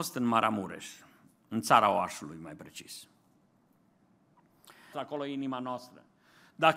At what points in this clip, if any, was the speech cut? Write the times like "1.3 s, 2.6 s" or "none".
4.9 s